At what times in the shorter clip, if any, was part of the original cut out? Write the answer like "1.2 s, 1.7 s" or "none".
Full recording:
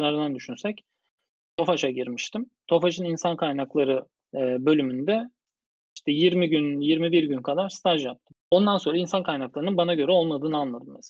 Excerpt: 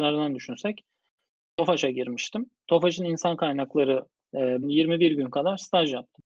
4.6 s